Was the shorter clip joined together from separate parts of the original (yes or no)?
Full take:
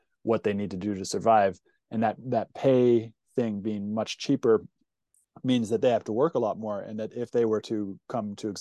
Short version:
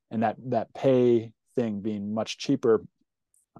no